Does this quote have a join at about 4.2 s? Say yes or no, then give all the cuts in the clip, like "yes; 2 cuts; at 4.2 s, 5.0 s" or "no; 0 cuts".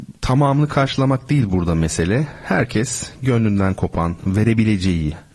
no; 0 cuts